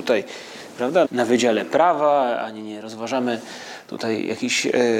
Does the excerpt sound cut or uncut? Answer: cut